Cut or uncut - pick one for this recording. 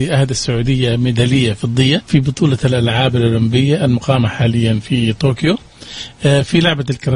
cut